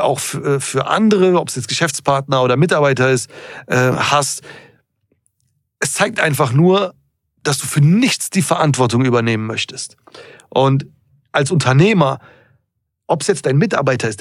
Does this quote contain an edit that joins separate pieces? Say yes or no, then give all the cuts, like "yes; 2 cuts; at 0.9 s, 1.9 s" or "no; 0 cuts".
no; 0 cuts